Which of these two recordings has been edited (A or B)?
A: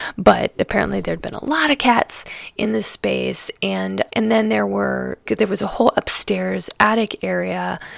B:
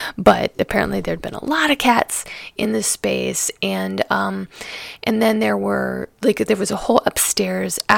A